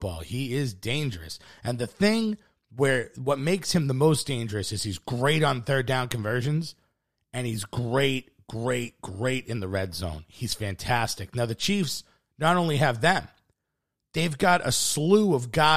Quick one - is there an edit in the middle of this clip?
no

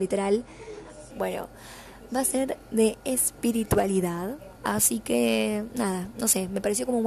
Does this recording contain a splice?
yes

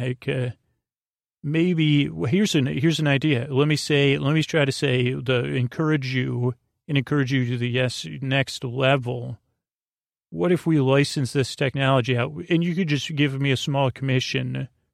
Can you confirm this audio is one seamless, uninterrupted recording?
yes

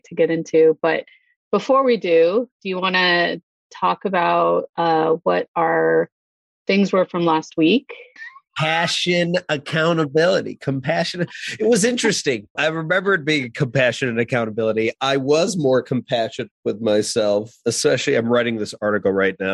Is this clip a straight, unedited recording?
no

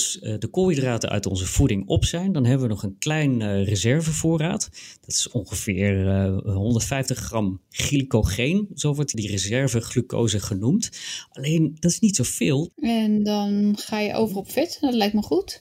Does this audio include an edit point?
yes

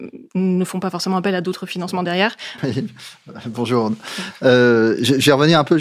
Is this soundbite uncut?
no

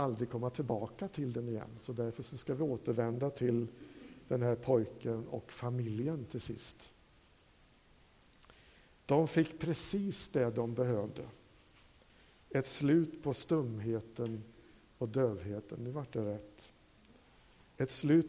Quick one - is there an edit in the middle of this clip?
no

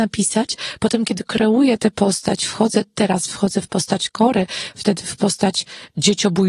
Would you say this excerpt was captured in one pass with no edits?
yes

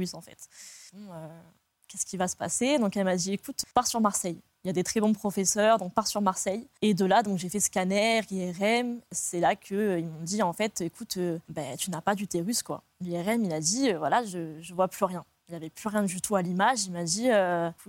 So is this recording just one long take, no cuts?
yes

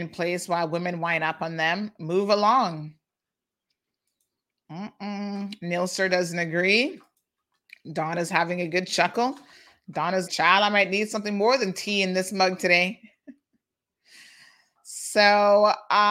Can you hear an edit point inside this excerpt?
yes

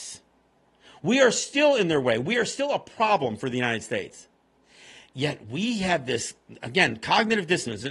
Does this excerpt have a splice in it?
no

